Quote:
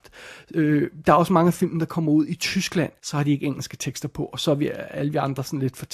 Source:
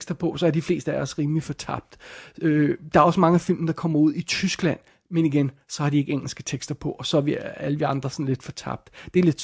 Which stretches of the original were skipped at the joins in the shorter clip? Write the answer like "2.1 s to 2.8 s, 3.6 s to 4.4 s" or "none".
4.9 s to 5.6 s